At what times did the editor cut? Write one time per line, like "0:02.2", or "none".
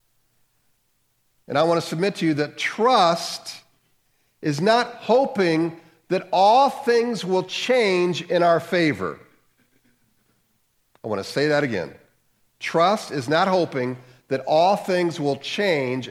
none